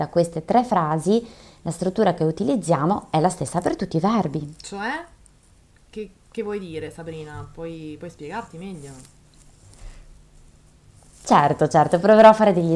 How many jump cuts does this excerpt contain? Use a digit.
0